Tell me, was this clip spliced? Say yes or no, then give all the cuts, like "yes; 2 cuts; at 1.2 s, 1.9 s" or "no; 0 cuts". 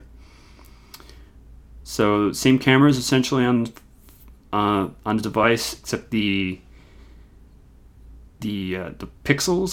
no; 0 cuts